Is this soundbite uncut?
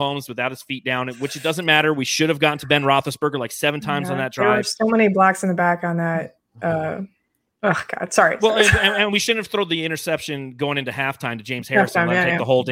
yes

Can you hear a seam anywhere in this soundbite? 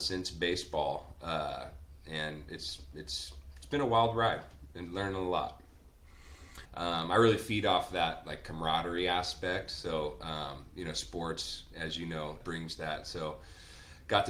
yes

